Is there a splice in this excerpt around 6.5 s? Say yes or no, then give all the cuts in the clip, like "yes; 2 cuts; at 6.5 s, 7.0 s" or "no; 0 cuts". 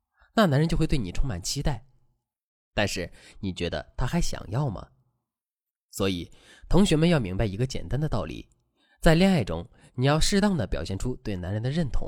no; 1 cut; at 3.3 s